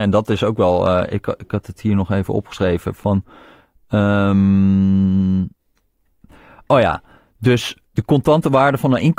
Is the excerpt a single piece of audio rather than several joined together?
yes; 0 cuts

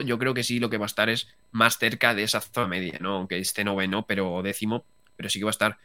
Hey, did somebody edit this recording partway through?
no; 0 cuts

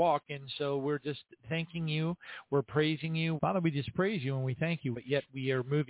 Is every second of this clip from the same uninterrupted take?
no; 2 cuts; at 3.4 s, 4.9 s

